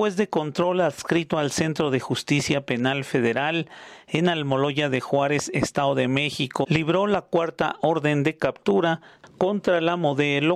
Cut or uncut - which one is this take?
cut